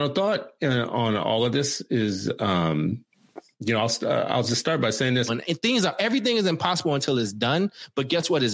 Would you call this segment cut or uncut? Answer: cut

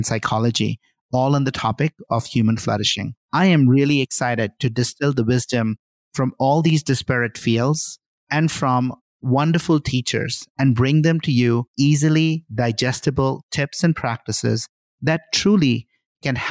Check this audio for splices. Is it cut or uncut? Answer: cut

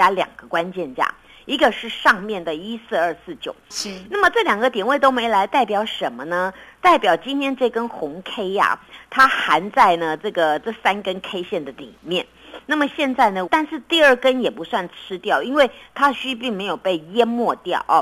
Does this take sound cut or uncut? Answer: cut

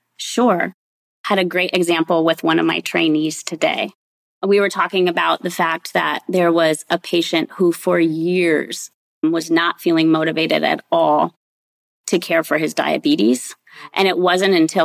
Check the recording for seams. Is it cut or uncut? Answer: uncut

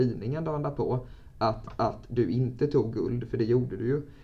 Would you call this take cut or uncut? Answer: uncut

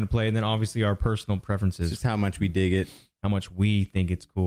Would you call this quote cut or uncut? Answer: uncut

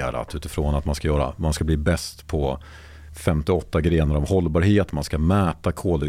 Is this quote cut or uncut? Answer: uncut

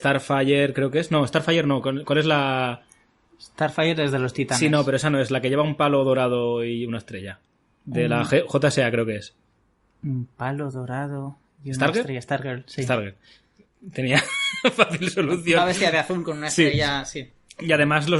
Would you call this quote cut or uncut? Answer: uncut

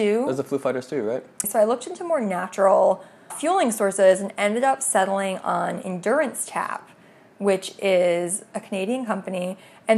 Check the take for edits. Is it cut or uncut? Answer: cut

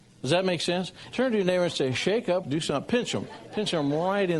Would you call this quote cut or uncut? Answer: cut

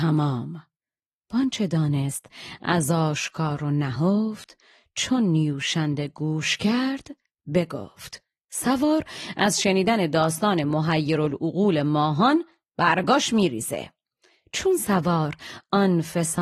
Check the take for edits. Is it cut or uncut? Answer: uncut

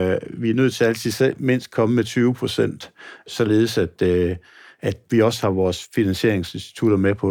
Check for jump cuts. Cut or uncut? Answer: uncut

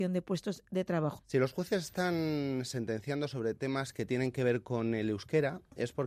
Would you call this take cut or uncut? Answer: cut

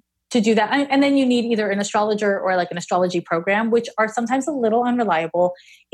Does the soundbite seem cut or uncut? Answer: uncut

